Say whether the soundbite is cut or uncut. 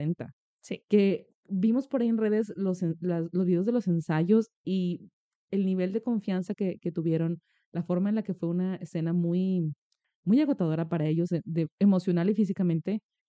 uncut